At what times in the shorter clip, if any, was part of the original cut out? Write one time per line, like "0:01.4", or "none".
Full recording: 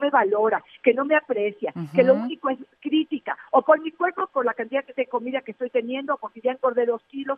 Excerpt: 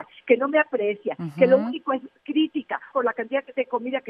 0:02.9